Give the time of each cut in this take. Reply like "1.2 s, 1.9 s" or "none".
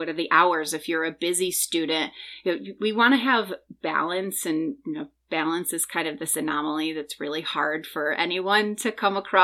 none